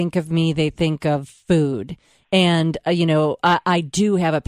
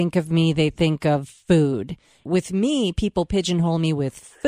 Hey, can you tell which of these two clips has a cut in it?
second; 1 cut; at 2.2 s

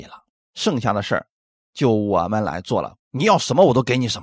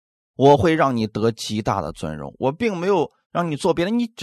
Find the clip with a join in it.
first; 1 cut; at 3.0 s

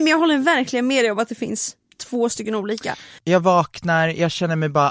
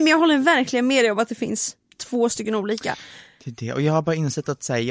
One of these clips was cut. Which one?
first; 1 cut; at 3.2 s

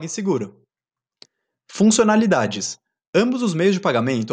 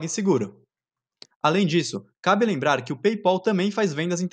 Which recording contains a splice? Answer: second; 1 cut; at 1.3 s

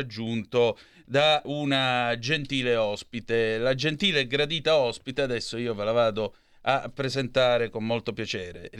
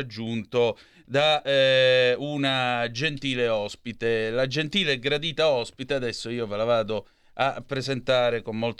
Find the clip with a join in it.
first; 1 cut; at 1.4 s

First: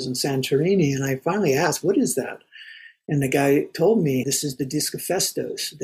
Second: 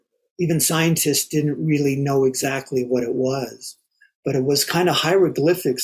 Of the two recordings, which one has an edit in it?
first; 1 cut; at 4.2 s

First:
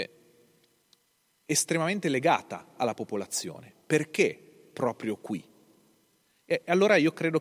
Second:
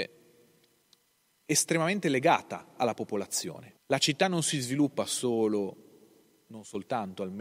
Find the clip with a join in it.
second; 1 cut; at 3.8 s

